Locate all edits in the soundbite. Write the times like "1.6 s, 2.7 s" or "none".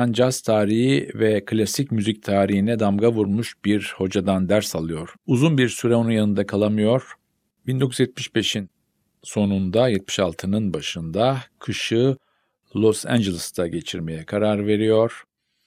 5.2 s, 7.5 s